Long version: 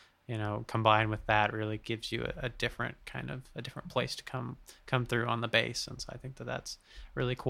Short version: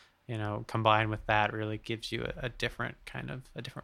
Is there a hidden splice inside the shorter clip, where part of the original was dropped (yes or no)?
no